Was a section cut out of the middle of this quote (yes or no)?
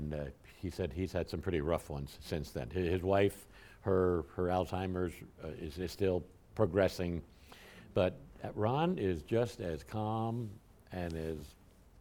no